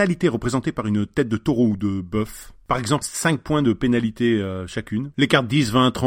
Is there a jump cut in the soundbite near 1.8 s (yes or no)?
no